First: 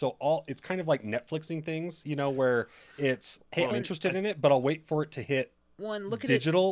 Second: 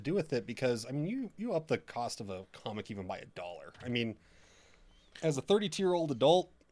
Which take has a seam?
first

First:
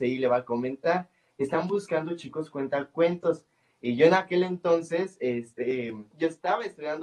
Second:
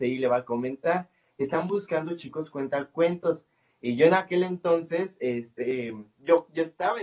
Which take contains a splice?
first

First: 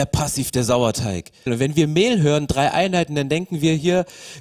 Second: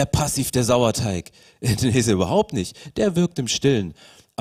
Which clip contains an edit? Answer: first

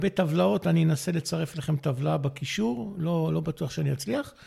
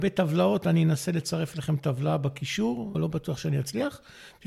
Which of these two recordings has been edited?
second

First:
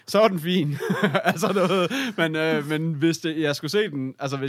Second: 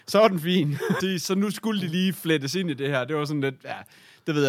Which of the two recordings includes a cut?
second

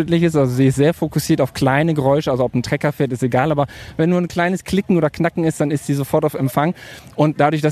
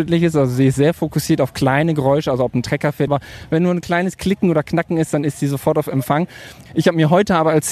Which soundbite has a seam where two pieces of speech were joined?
second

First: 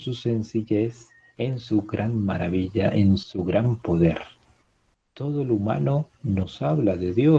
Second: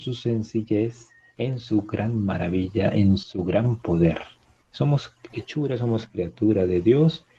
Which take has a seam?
second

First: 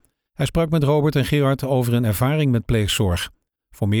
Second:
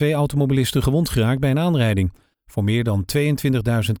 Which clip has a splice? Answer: second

